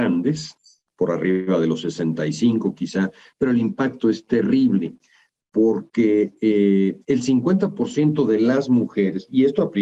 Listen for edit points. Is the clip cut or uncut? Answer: uncut